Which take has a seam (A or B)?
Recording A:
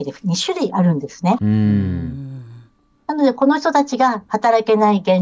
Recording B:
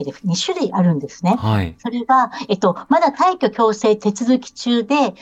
A